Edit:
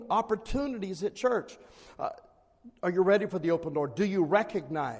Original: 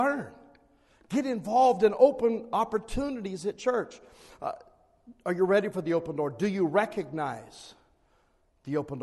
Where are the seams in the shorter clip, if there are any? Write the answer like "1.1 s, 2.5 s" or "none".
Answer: none